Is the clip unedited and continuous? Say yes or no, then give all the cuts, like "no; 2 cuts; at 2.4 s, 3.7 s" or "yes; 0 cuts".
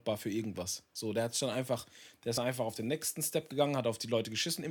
yes; 0 cuts